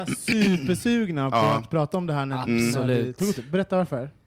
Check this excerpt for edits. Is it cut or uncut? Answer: uncut